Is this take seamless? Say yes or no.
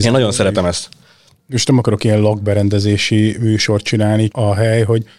no